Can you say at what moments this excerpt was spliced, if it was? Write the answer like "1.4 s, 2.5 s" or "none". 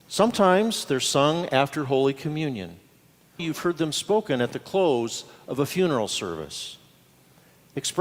3.4 s